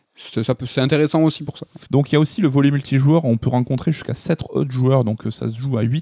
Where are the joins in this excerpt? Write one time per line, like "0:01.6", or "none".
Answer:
0:01.9